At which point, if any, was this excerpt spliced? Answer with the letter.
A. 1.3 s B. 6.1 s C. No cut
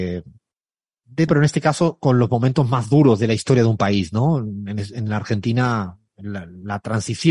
A